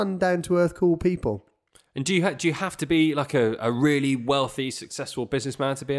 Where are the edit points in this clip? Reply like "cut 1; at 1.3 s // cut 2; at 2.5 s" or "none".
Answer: none